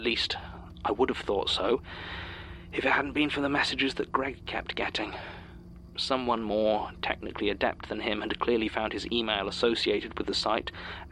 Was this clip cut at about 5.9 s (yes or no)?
no